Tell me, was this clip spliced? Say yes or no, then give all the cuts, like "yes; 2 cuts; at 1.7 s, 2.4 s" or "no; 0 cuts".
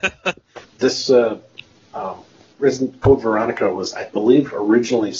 no; 0 cuts